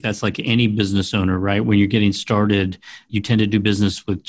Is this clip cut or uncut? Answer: cut